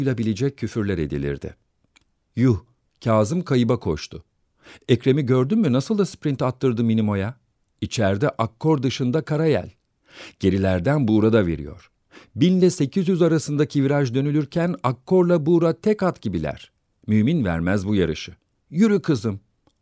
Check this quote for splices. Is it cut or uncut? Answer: uncut